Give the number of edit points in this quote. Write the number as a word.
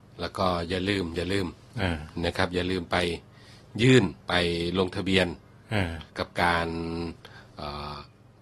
two